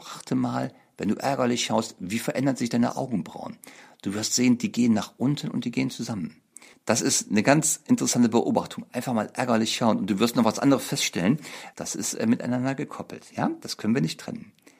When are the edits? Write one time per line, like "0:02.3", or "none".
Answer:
0:06.7
0:11.7